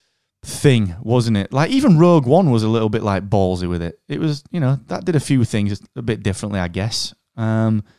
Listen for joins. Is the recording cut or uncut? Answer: uncut